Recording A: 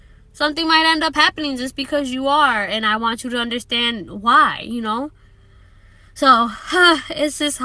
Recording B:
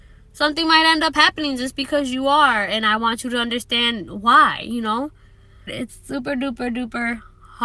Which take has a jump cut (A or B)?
B